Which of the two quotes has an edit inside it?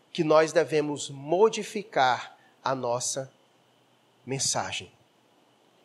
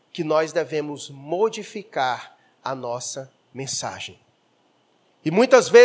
second; 1 cut; at 3.4 s

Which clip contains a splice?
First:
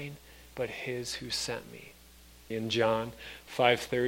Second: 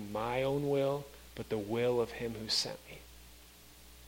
first; 1 cut; at 2.5 s

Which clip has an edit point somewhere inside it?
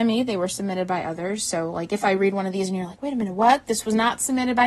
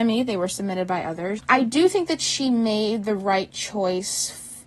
second; 1 cut; at 1.4 s

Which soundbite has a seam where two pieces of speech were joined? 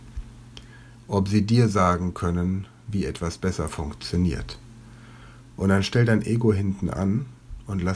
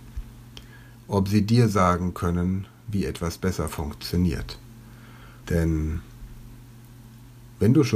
second; 1 cut; at 5.4 s

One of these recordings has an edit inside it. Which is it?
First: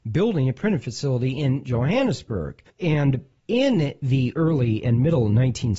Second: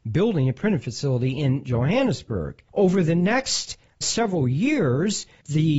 first; 1 cut; at 2.7 s

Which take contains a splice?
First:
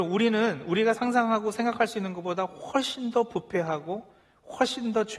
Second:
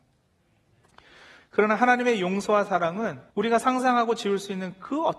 second; 2 cuts; at 1.4 s, 3.3 s

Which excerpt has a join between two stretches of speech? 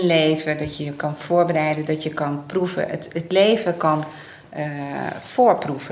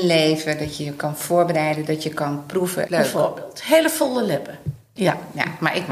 second; 2 cuts; at 2.9 s, 5.0 s

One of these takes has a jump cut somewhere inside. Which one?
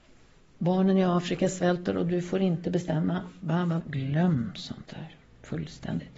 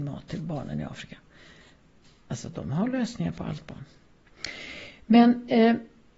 first; 1 cut; at 3.8 s

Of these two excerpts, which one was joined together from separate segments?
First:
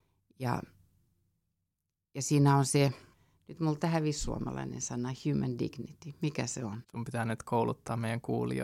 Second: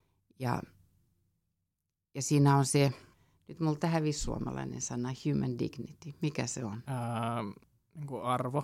first; 1 cut; at 6.8 s

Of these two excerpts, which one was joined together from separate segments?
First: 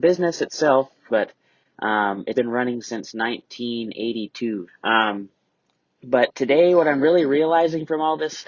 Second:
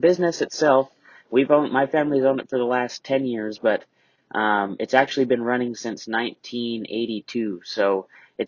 first; 3 cuts; at 1.1 s, 2.3 s, 4.7 s

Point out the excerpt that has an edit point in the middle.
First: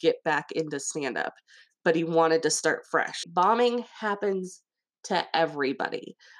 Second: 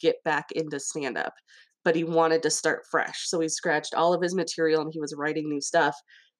first; 1 cut; at 3.2 s

